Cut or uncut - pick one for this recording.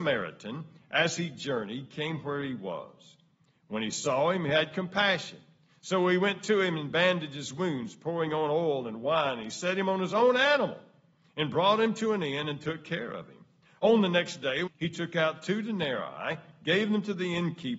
cut